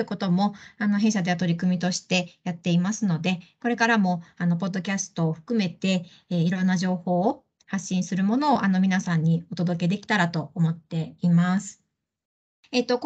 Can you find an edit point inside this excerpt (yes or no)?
no